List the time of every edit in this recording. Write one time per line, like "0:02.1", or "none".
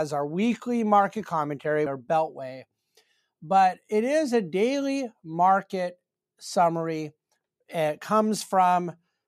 0:01.9